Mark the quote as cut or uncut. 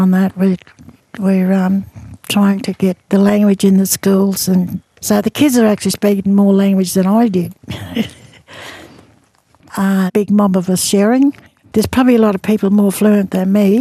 cut